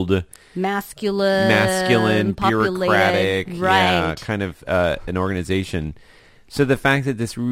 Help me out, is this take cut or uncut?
uncut